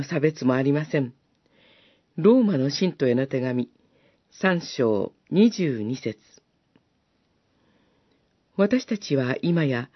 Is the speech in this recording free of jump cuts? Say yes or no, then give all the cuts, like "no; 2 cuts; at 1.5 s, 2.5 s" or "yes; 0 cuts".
yes; 0 cuts